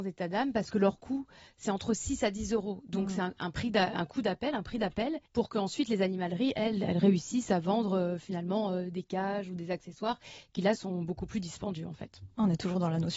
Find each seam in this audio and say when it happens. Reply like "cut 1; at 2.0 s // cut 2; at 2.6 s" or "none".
cut 1; at 5.3 s